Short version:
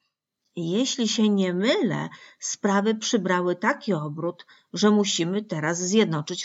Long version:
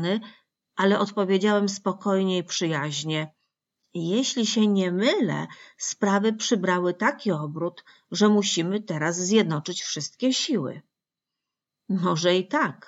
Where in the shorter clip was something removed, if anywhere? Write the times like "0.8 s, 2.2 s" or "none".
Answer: none